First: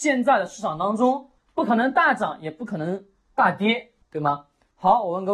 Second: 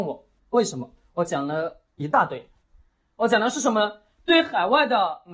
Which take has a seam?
first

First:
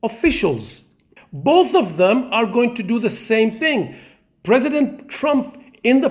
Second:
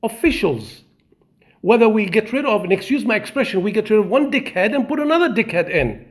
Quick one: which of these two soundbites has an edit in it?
first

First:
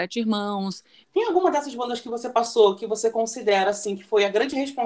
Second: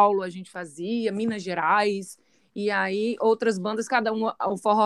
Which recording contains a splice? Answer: first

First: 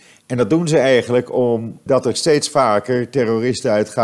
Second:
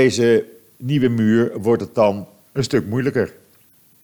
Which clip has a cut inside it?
first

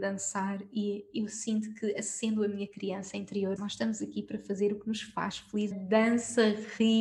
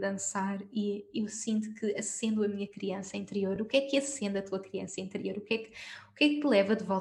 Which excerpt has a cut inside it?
first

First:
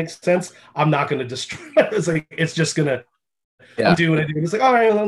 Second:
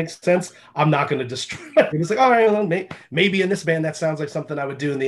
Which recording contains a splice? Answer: second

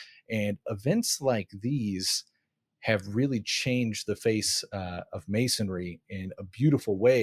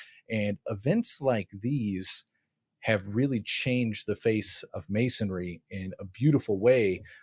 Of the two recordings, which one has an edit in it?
second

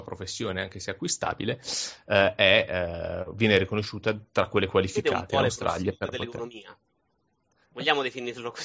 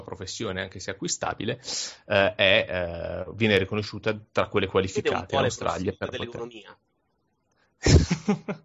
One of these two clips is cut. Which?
first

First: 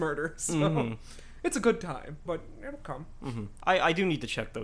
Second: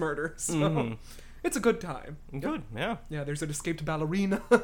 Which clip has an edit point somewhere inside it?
first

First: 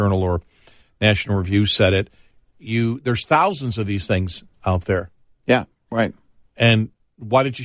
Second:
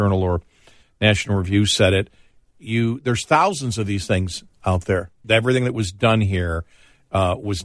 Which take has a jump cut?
second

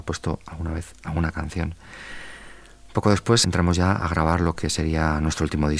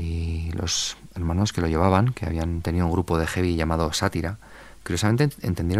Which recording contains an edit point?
first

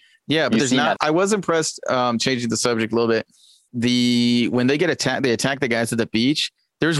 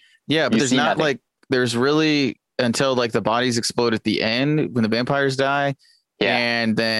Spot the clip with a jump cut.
first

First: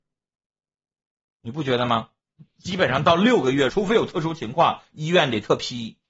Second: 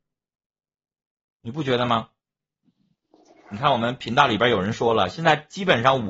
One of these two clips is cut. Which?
first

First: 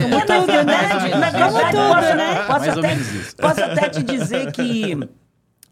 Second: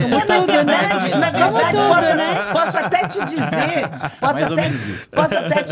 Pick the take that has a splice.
first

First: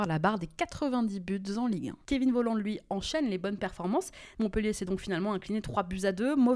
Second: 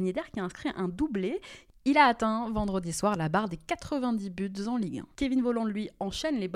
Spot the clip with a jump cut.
first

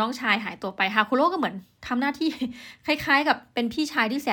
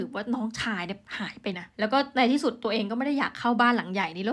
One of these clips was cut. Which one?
second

